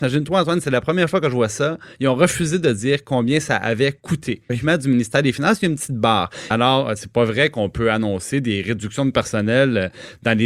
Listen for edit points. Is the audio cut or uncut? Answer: cut